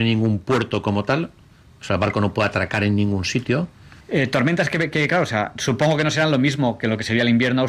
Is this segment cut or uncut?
cut